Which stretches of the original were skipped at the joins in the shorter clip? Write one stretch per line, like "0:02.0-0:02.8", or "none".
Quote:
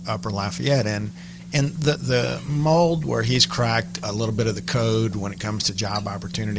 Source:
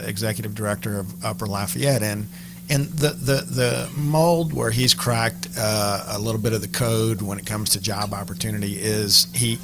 0:03.1-0:03.4
0:05.5-0:06.1